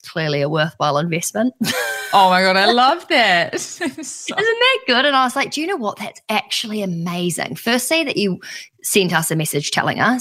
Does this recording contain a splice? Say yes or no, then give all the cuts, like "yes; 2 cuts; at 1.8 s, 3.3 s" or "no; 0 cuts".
no; 0 cuts